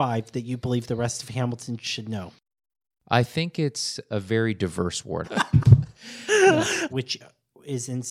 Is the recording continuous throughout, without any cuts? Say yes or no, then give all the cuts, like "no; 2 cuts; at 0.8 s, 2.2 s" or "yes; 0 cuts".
no; 2 cuts; at 5.2 s, 6.9 s